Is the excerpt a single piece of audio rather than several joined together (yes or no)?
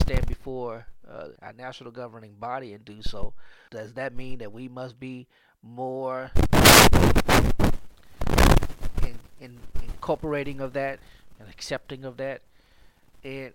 no